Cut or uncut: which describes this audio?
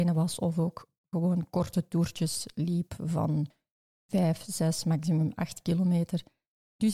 uncut